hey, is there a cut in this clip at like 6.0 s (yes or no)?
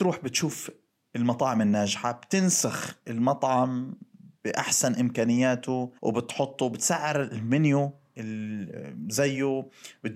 yes